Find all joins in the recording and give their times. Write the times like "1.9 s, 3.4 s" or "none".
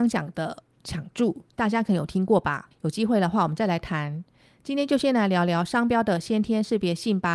2.7 s